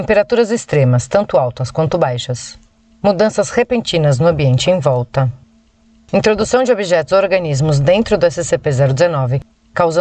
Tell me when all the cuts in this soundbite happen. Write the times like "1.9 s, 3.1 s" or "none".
none

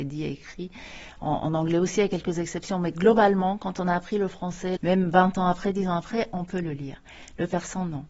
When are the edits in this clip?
4.8 s

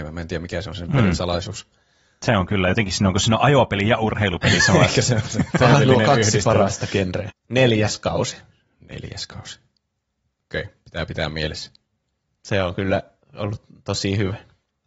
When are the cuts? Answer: 7.3 s

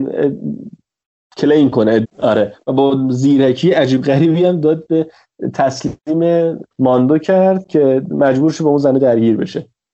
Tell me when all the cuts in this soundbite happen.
2.0 s, 6.7 s

